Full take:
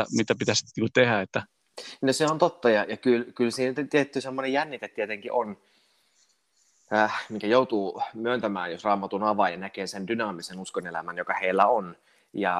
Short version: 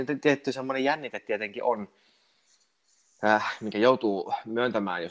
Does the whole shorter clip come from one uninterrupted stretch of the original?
yes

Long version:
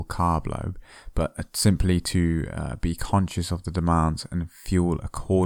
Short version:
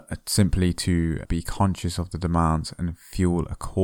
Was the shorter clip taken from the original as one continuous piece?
no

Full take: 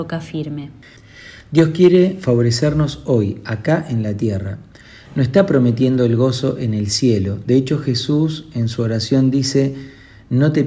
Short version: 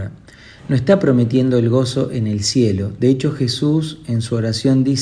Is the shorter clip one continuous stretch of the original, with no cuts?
yes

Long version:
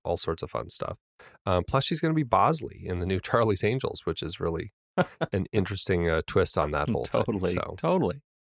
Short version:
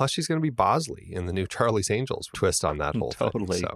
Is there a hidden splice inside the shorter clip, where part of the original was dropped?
yes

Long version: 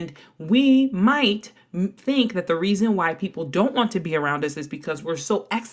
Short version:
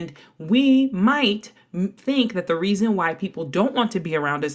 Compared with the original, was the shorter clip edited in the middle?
no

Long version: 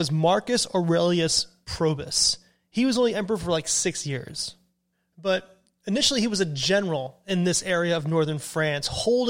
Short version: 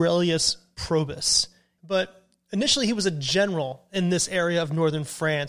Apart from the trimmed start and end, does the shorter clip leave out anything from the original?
yes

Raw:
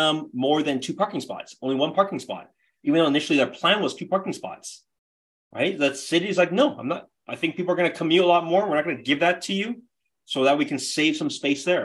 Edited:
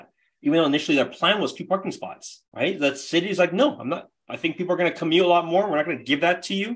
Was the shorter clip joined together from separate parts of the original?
yes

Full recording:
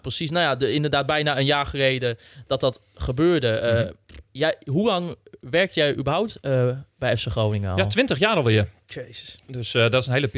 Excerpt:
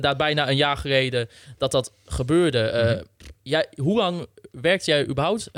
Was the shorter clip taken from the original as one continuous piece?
yes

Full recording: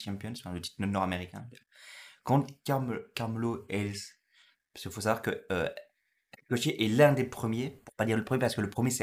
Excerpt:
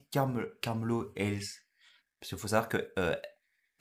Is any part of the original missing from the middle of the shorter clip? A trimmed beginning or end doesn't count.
no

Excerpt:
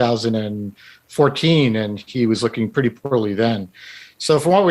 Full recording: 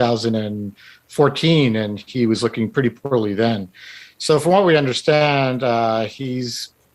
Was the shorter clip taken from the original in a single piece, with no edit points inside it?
yes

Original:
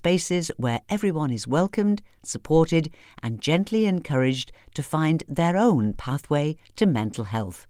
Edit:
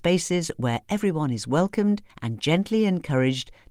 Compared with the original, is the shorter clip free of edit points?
no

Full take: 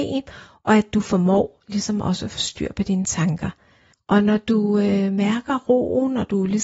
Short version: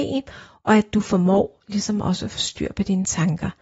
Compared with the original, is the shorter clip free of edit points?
yes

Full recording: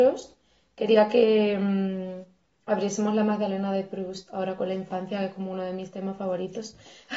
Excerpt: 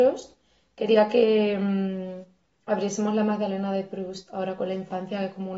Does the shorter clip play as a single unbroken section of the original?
yes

